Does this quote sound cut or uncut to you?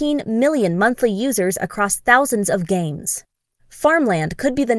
cut